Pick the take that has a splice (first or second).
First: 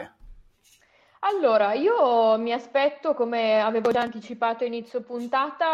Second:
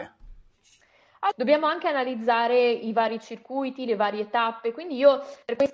second